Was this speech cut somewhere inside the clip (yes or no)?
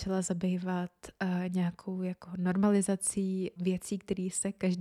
yes